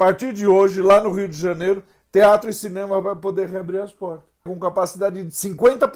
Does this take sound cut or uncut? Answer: cut